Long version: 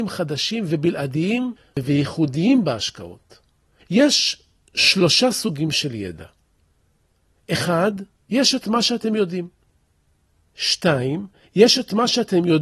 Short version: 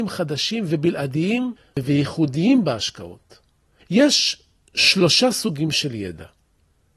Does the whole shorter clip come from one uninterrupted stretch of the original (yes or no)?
yes